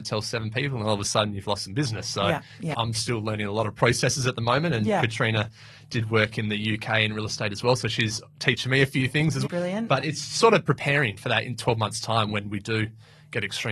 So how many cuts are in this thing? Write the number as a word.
two